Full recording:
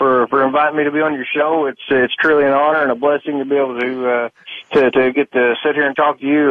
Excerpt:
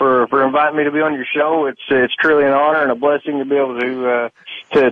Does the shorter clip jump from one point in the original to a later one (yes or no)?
no